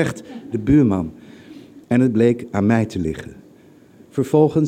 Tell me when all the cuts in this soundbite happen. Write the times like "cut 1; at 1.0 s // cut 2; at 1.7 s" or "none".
cut 1; at 1.8 s